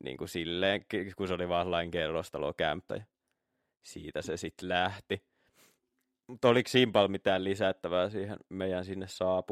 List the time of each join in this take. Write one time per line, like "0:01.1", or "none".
0:02.9